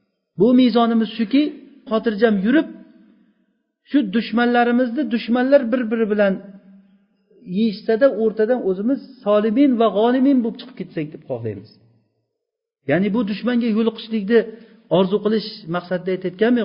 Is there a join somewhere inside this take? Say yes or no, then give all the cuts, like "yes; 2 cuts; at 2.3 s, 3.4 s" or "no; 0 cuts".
yes; 1 cut; at 1.9 s